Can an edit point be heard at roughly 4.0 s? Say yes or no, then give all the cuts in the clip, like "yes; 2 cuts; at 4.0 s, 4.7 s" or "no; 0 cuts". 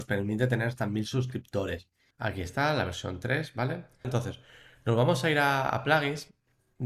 yes; 2 cuts; at 2.1 s, 4.0 s